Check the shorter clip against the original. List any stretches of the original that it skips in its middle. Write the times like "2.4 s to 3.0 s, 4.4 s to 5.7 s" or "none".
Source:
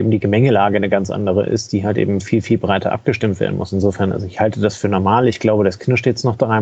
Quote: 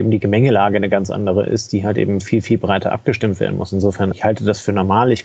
4.1 s to 4.3 s